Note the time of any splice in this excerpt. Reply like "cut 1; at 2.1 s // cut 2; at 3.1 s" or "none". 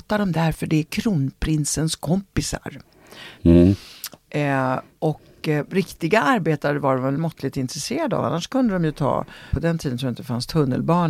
cut 1; at 3.4 s // cut 2; at 9.5 s